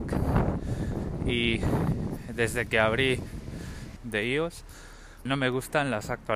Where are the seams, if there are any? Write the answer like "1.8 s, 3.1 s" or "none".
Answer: 4.0 s, 5.3 s